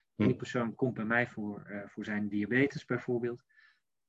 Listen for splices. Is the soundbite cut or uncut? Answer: uncut